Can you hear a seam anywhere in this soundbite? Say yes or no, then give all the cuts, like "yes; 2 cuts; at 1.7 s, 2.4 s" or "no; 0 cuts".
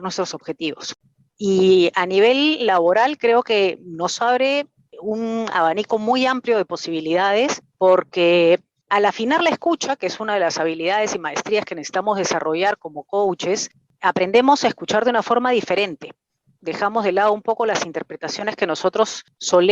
no; 0 cuts